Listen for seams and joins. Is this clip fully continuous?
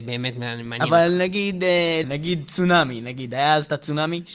no; 1 cut; at 2.0 s

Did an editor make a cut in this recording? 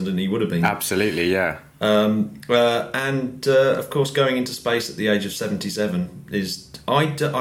no; 0 cuts

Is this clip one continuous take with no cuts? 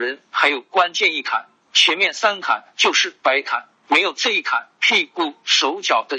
no; 2 cuts; at 1.6 s, 4.8 s

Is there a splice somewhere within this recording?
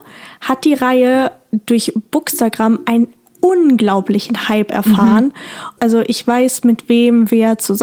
yes; 1 cut; at 5.8 s

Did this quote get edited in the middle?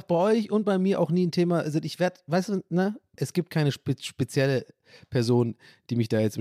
yes; 1 cut; at 3.1 s

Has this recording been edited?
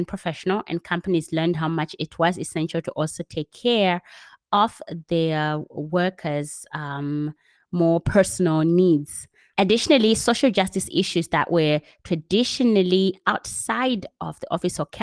yes; 1 cut; at 9.5 s

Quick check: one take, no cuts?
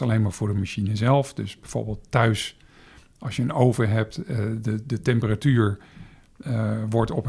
yes; 0 cuts

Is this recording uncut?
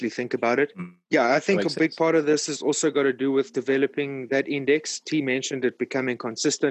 no; 1 cut; at 1.0 s

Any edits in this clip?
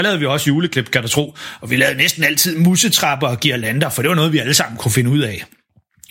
no; 0 cuts

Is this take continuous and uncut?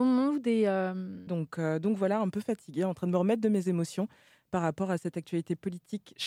no; 1 cut; at 1.3 s

